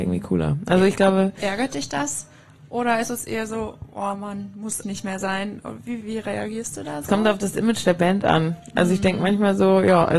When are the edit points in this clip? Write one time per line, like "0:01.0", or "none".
0:04.8
0:06.0